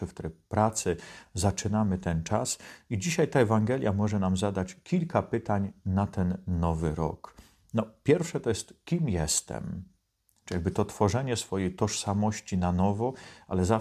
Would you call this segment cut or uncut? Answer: uncut